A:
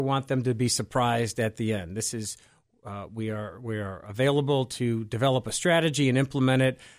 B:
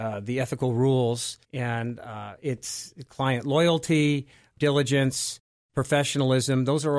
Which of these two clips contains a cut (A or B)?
B